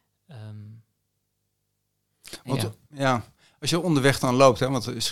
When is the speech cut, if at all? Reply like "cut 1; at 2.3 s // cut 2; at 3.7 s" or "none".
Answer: none